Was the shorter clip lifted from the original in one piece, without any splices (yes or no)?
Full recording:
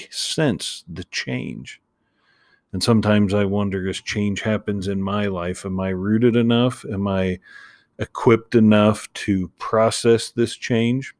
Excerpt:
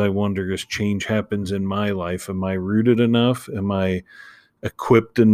yes